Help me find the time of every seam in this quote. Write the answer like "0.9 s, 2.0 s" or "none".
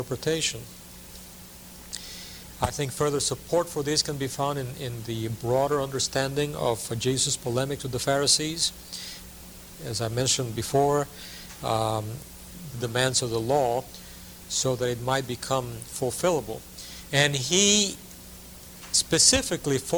12.7 s, 17.1 s